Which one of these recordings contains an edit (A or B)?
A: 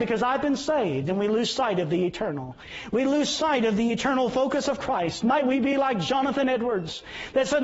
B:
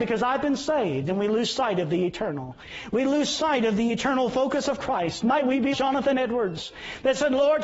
B